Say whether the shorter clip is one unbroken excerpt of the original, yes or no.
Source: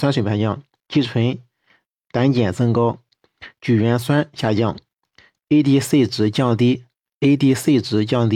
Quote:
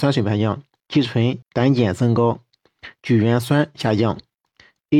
no